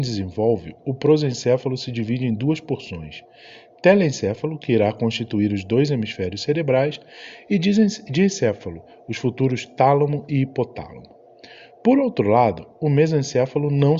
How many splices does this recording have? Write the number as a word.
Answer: zero